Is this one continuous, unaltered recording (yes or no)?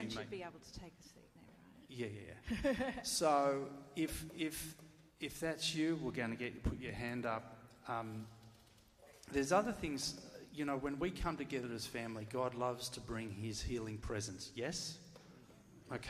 no